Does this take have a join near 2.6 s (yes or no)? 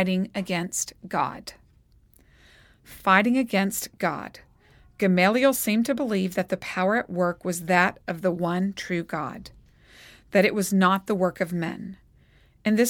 no